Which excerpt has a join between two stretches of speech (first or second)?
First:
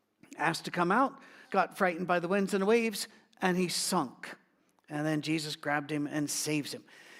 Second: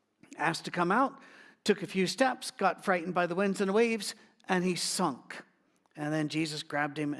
first